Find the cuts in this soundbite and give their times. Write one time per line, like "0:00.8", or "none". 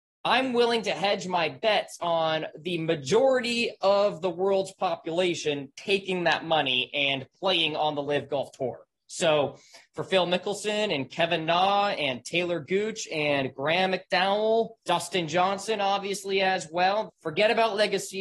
0:14.8
0:17.1